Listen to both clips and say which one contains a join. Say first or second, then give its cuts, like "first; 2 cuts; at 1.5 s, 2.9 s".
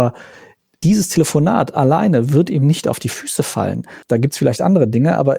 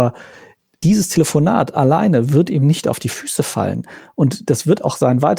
first; 1 cut; at 4.0 s